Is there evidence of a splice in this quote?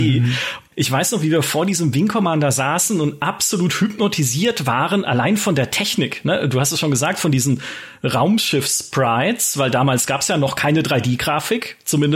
no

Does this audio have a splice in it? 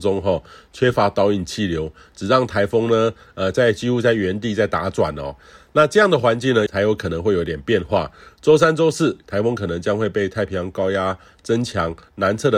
yes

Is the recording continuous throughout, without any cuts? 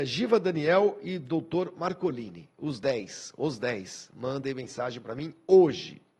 yes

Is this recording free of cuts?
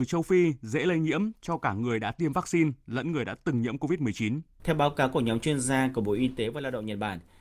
no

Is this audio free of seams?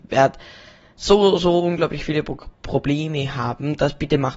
yes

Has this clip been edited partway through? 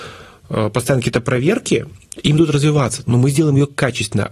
yes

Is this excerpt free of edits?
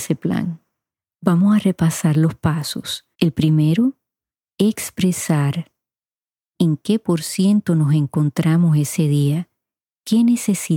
no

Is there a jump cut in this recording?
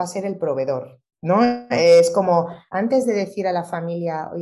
yes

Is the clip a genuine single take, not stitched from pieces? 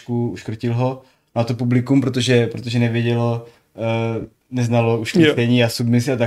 yes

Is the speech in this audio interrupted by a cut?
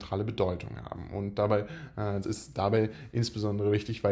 yes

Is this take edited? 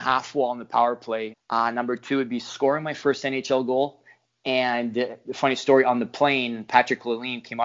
yes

